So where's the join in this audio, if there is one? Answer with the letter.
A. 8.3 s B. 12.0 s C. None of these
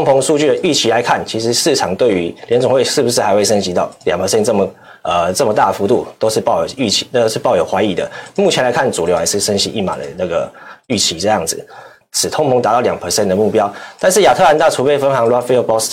B